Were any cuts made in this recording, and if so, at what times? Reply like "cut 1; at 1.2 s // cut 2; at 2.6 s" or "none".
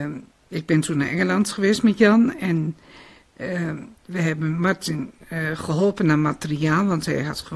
none